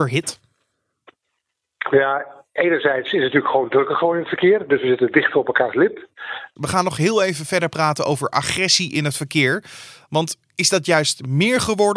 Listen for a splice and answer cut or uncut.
cut